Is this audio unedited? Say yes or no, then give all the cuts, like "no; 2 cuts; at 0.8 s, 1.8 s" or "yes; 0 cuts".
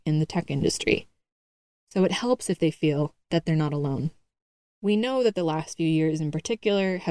no; 2 cuts; at 1.8 s, 4.6 s